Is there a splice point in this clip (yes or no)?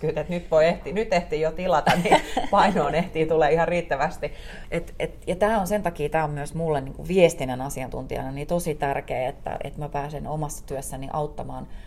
yes